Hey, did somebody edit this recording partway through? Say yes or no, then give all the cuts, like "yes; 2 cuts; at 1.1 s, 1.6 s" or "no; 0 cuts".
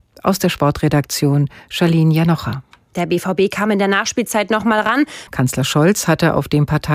yes; 2 cuts; at 2.9 s, 5.3 s